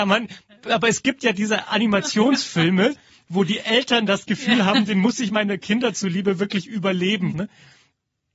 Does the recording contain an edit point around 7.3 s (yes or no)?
yes